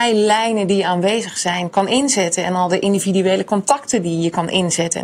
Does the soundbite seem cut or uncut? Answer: uncut